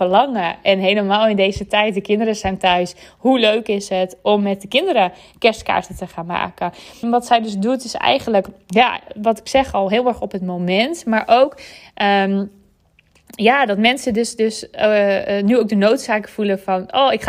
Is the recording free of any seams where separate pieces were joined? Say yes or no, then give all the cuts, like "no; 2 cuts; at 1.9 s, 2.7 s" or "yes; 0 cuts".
no; 1 cut; at 7.0 s